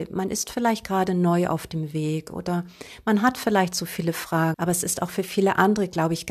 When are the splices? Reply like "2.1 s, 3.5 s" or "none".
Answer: 4.5 s

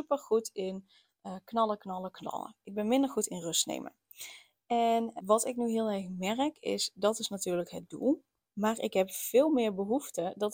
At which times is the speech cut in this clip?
5.2 s

